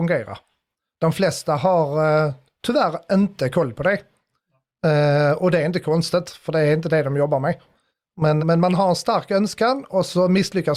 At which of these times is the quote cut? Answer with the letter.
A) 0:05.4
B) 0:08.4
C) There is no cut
B